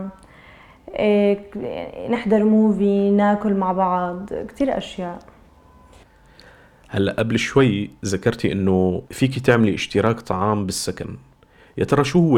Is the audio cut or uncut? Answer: cut